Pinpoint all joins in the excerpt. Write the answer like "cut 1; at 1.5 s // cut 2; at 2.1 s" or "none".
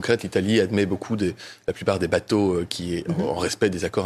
cut 1; at 2.7 s